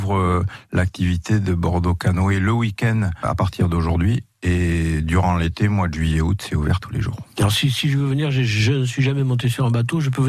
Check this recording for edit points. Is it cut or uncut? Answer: uncut